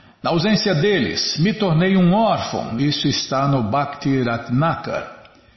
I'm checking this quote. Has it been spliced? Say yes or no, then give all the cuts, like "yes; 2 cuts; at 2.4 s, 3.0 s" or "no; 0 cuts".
no; 0 cuts